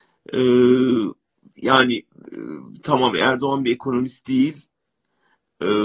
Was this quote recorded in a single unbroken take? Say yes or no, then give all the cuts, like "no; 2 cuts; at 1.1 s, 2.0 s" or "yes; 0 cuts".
yes; 0 cuts